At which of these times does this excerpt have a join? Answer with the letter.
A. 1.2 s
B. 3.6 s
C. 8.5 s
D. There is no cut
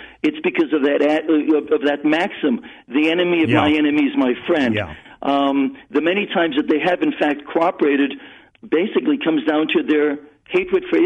C